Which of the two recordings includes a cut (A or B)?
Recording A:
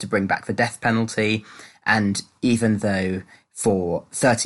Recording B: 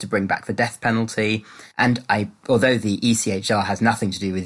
B